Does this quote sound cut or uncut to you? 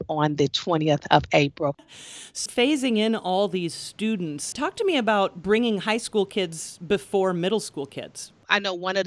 cut